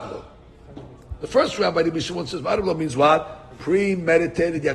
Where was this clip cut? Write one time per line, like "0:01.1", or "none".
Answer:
none